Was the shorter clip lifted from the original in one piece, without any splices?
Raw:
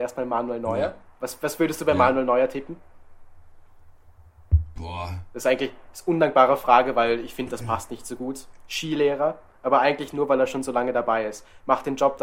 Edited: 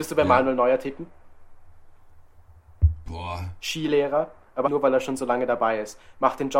no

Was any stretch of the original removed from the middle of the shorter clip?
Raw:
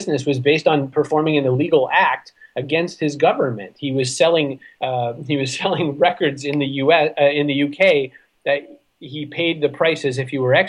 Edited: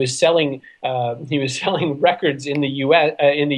no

